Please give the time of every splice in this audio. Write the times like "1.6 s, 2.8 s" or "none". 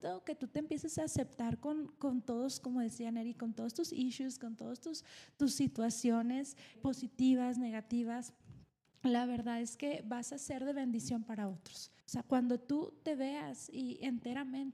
6.7 s, 12.0 s

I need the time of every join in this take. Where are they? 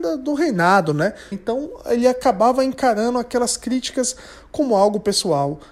1.3 s

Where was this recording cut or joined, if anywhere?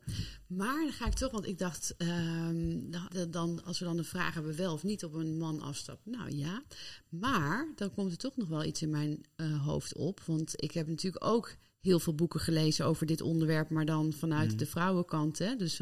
3.1 s

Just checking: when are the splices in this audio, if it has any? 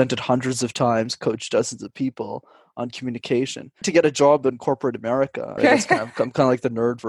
3.8 s, 5.6 s

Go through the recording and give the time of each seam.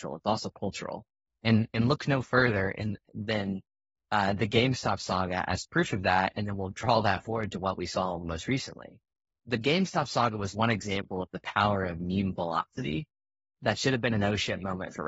none

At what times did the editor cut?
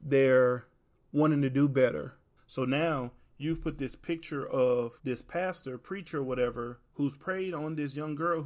2.4 s, 5.0 s

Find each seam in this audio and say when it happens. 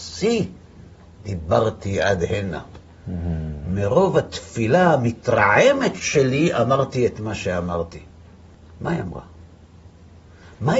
none

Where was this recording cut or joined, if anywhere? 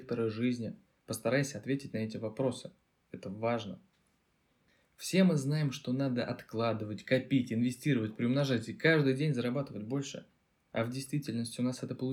none

